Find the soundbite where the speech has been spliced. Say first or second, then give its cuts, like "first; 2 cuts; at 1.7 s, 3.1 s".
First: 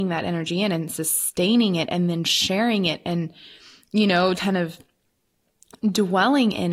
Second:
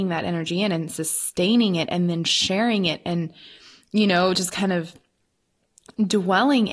first; 1 cut; at 4.3 s